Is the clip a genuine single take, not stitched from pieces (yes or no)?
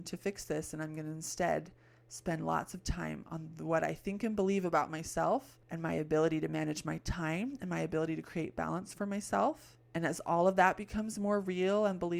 yes